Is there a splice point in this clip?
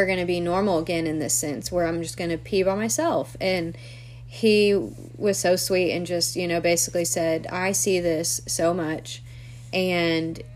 no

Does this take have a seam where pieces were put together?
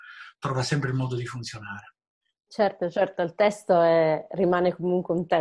no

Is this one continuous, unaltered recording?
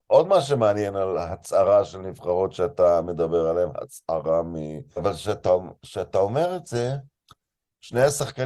no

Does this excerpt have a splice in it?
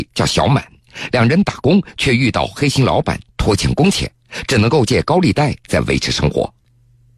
no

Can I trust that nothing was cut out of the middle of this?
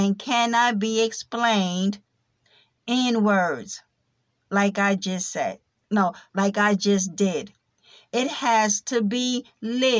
no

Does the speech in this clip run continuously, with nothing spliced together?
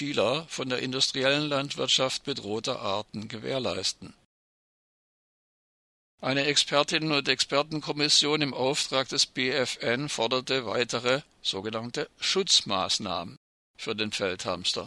no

